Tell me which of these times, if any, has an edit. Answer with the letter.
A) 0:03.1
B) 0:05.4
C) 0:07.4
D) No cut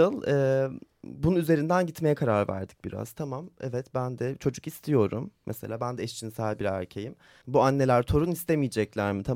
C